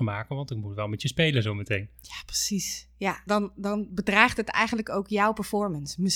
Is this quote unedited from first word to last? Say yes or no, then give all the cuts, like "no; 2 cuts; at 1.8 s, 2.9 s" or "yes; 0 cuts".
no; 1 cut; at 3.3 s